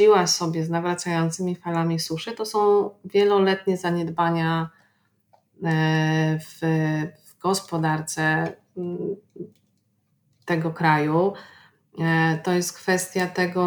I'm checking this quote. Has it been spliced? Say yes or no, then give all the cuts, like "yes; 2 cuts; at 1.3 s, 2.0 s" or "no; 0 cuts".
no; 0 cuts